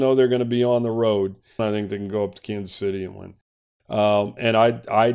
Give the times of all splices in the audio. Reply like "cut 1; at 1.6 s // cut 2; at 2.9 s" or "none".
cut 1; at 1.6 s